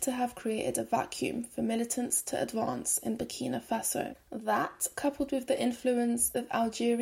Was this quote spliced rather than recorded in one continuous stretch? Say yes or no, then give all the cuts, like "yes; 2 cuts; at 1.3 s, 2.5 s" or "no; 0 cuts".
yes; 1 cut; at 4.1 s